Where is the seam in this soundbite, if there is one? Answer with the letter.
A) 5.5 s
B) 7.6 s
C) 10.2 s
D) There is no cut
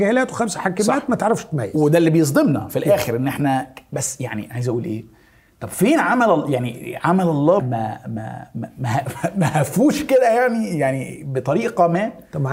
B